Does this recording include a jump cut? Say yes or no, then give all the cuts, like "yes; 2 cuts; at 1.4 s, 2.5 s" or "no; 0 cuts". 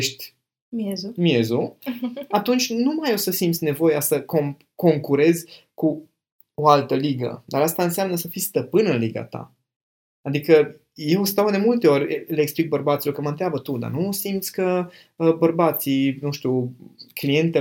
no; 0 cuts